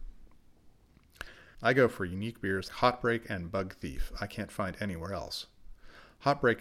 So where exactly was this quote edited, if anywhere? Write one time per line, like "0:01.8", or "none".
0:01.5
0:02.7